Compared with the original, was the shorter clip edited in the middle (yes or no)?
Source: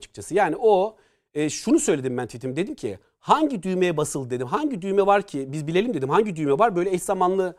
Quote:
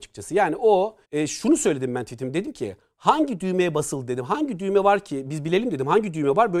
yes